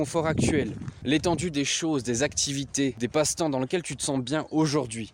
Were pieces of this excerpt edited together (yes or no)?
no